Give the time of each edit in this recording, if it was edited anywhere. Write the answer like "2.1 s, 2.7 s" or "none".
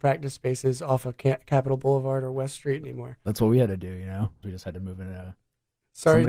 4.4 s